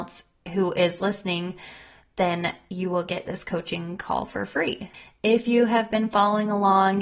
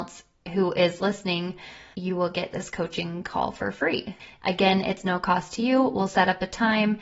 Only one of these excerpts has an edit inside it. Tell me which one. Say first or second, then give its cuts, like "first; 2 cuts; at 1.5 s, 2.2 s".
second; 2 cuts; at 1.9 s, 4.4 s